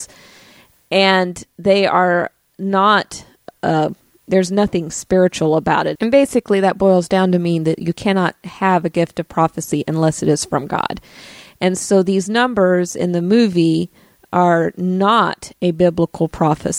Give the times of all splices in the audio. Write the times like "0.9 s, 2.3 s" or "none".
6.0 s